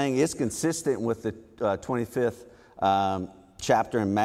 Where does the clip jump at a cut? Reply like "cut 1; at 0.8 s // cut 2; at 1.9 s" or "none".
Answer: none